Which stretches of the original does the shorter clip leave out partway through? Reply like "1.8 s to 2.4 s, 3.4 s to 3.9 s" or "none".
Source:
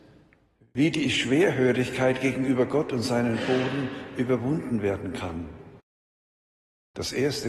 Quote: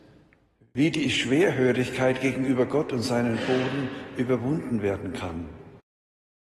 none